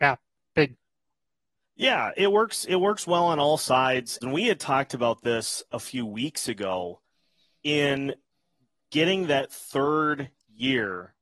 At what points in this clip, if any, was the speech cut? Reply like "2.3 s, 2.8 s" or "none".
4.2 s